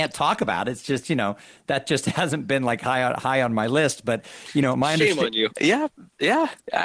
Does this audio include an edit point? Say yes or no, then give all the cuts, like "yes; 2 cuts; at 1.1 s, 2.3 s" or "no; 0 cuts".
yes; 1 cut; at 5.5 s